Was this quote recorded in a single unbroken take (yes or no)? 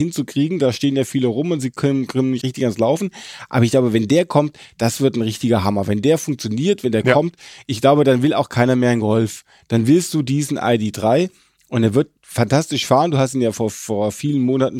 no